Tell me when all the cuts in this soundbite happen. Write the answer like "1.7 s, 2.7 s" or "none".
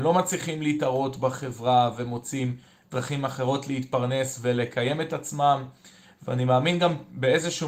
none